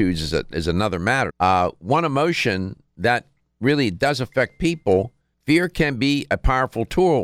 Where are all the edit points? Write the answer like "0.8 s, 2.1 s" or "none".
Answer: 1.3 s, 5.3 s